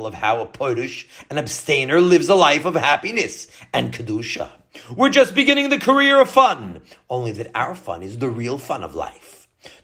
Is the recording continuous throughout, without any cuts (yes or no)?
yes